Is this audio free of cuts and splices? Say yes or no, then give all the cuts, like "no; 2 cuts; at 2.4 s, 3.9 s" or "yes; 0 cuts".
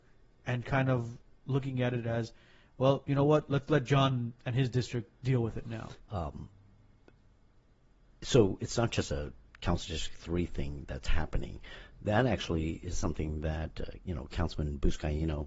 no; 1 cut; at 6.0 s